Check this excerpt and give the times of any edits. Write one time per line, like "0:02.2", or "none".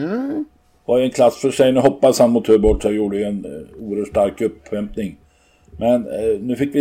0:03.4